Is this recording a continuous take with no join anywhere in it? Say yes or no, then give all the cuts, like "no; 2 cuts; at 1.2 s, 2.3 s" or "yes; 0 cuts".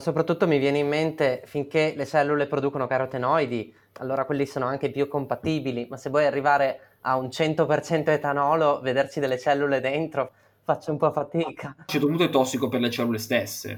yes; 0 cuts